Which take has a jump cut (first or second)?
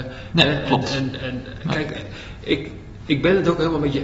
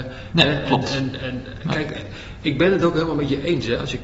second